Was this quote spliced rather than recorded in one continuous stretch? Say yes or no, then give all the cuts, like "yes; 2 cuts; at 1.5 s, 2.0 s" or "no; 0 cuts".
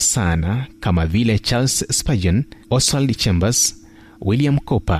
yes; 1 cut; at 2.6 s